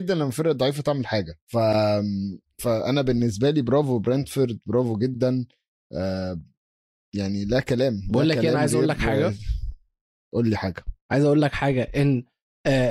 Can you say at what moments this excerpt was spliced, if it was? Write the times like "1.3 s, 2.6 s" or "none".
1.4 s, 11.0 s